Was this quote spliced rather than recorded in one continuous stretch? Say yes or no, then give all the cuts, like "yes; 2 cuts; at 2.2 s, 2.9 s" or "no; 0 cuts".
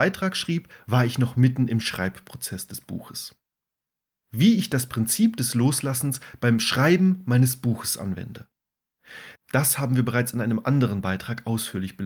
yes; 1 cut; at 9.3 s